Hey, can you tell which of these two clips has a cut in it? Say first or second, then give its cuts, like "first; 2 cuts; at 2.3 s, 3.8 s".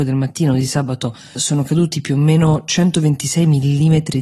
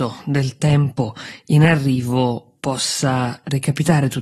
first; 1 cut; at 1.4 s